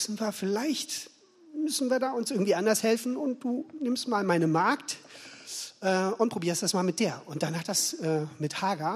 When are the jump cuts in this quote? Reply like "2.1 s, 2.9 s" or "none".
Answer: none